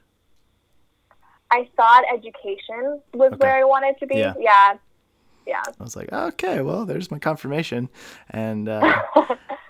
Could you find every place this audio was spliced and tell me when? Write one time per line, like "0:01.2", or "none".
0:03.1
0:05.8